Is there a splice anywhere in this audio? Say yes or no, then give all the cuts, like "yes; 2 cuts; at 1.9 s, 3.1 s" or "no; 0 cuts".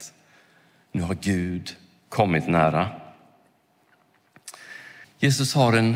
yes; 1 cut; at 5.0 s